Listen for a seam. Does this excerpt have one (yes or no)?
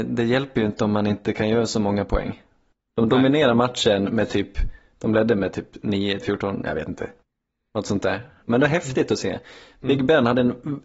yes